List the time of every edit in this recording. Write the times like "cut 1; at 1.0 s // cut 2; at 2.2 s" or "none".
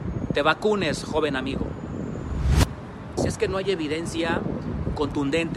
cut 1; at 3.2 s